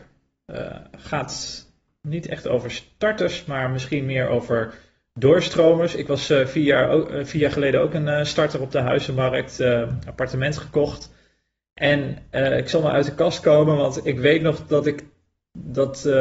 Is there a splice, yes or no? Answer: no